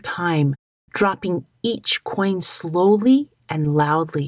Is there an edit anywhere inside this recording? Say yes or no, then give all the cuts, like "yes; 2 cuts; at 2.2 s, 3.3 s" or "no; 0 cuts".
no; 0 cuts